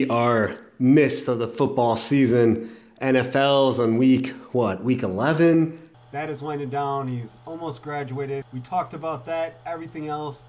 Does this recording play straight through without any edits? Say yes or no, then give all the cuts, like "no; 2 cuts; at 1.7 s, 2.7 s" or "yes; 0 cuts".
no; 2 cuts; at 5.9 s, 8.4 s